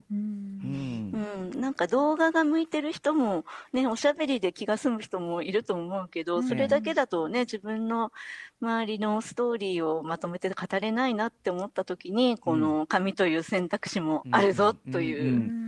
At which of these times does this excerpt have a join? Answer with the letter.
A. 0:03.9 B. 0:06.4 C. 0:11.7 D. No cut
D